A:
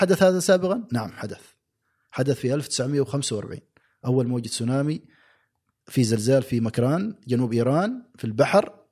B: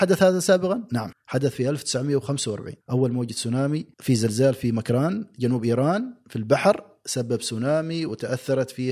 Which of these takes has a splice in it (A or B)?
B